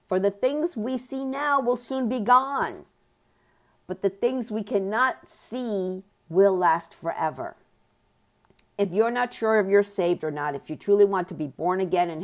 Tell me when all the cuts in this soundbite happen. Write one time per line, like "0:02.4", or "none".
none